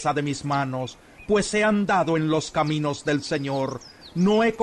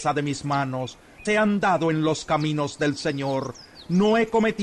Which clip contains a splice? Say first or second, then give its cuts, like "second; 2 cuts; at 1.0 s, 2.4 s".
second; 1 cut; at 1.3 s